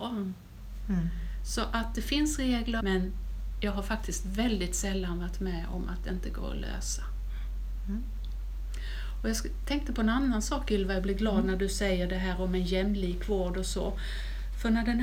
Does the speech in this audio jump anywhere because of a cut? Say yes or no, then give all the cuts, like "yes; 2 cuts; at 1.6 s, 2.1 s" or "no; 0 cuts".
yes; 1 cut; at 2.8 s